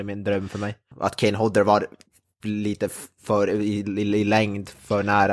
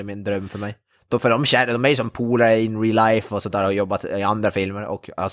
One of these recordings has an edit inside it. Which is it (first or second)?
first